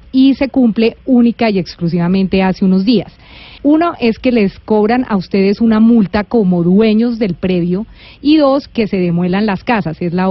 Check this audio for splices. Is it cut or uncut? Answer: cut